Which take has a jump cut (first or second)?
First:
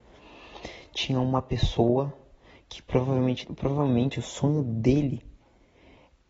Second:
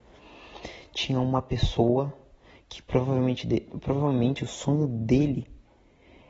first